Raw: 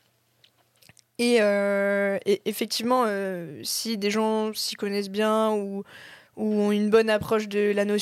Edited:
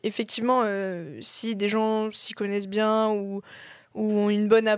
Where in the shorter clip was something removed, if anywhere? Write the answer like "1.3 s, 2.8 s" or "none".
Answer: none